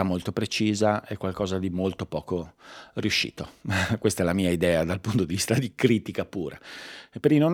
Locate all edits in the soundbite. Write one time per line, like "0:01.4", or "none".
none